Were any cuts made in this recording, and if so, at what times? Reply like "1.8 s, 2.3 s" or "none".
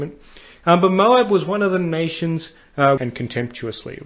3.0 s

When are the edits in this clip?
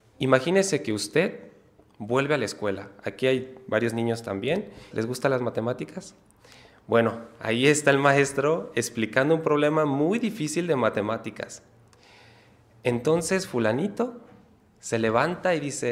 4.9 s

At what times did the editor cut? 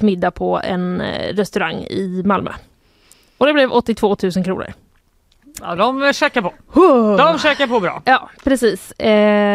none

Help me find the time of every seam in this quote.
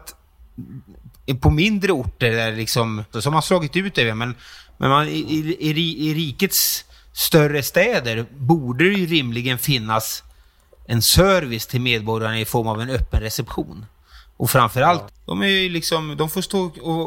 3.1 s, 15.1 s

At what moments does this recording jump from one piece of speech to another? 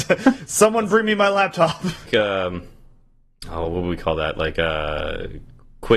2.1 s

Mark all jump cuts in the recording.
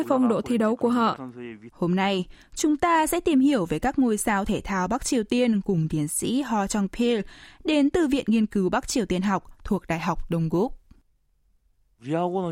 1.7 s

